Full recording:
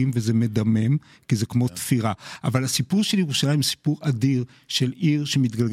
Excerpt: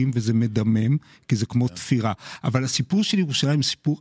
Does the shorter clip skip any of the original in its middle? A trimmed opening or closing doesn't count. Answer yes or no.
no